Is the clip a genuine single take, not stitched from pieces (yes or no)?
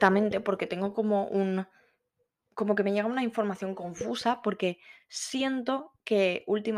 yes